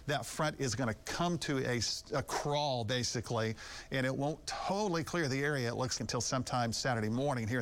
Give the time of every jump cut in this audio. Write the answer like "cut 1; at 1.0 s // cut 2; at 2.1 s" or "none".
cut 1; at 6.0 s